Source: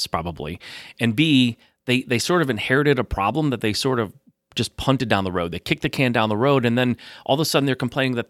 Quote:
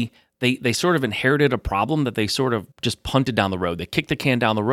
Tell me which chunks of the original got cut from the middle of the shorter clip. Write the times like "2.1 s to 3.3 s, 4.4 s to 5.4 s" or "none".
4.2 s to 4.5 s

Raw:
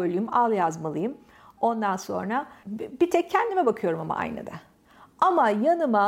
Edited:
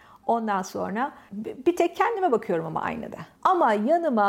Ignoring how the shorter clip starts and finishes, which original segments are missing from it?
4.7 s to 5.1 s

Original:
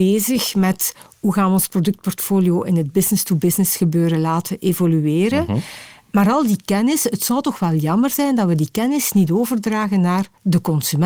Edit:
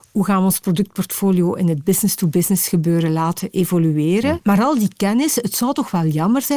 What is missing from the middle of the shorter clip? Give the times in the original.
5.4 s to 6.0 s

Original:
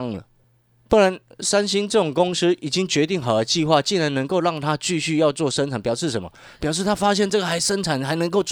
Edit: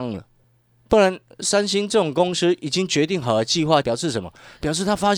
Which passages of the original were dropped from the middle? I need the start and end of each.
3.8 s to 5.8 s

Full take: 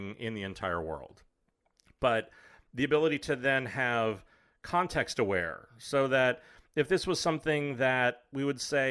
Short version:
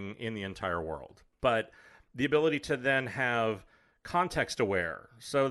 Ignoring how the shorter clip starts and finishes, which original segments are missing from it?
1.3 s to 1.9 s

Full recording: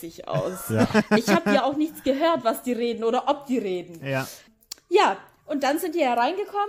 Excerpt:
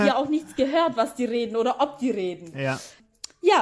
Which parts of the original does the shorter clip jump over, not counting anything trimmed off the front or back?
none

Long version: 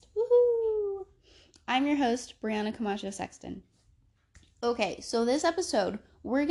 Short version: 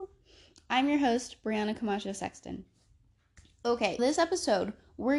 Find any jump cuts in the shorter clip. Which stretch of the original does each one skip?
5.0 s to 5.2 s

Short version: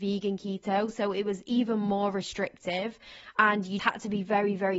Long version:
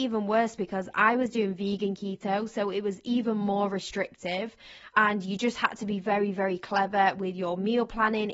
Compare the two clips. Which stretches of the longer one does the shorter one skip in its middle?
5.4 s to 5.6 s

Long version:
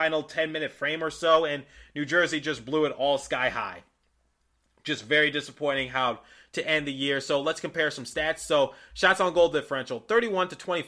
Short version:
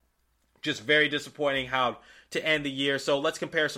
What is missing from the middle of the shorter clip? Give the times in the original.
none

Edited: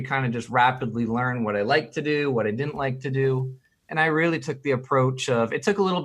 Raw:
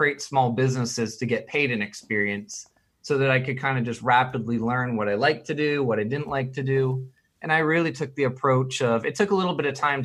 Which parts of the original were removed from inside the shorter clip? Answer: none

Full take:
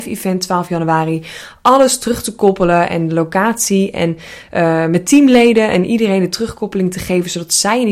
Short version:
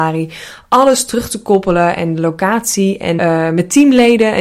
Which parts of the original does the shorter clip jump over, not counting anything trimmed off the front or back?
4.1 s to 4.5 s

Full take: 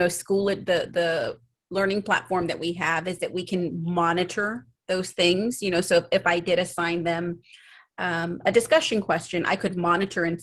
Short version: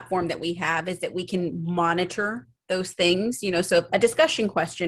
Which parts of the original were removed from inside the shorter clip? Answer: 6.1 s to 8.4 s

